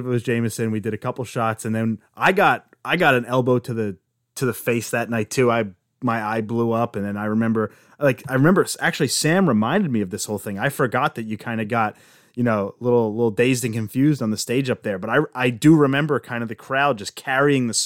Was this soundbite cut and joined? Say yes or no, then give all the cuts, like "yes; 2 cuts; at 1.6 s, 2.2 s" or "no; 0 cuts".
no; 0 cuts